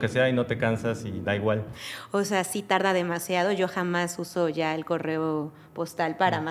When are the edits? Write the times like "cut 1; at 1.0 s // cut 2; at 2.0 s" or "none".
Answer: cut 1; at 1.7 s